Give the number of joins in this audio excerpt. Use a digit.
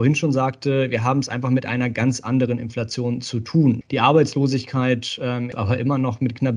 2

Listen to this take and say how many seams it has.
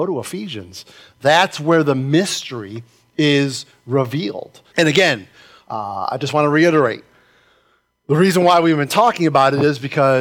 1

